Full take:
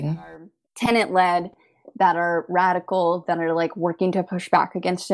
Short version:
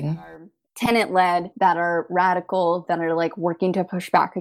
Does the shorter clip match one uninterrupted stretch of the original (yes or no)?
no